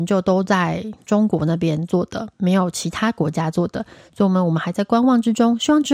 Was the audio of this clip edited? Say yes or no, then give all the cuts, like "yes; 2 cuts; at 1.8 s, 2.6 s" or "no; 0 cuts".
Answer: no; 0 cuts